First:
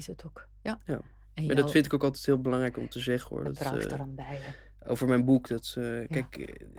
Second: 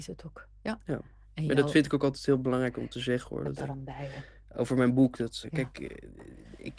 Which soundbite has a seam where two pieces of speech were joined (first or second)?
second